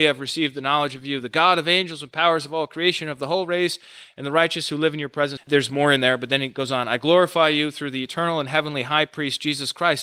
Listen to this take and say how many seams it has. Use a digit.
1